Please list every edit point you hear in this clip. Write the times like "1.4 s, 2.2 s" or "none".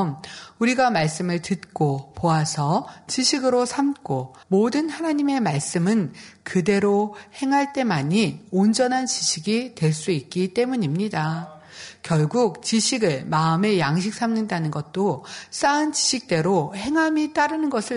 4.4 s